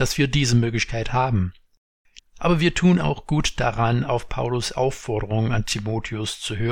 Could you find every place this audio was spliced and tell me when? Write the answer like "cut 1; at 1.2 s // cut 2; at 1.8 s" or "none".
cut 1; at 2.2 s